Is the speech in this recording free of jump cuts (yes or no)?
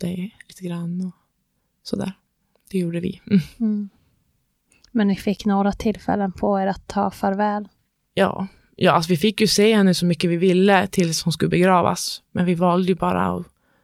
yes